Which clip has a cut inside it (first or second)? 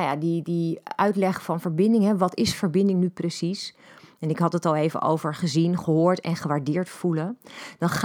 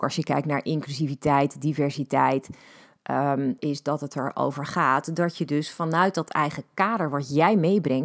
second